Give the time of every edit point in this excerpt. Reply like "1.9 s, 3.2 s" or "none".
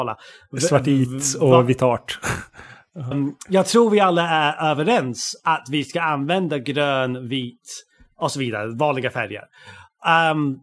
3.1 s